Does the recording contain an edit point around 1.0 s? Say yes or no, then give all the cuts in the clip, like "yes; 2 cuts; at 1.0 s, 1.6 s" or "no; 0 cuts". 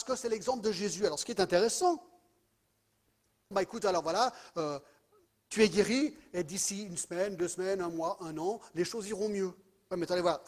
no; 1 cut; at 3.5 s